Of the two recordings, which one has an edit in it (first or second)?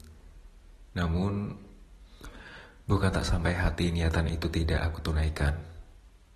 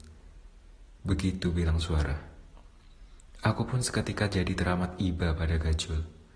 first